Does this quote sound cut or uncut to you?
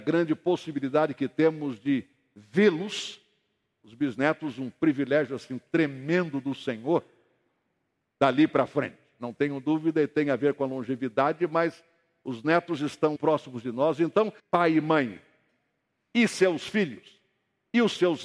cut